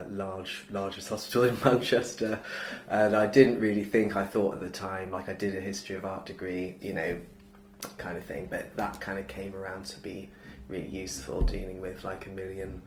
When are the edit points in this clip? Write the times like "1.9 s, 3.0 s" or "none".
6.8 s, 8.0 s